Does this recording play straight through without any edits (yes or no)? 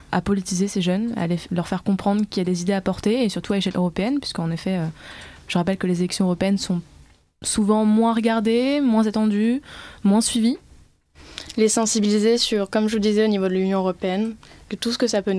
yes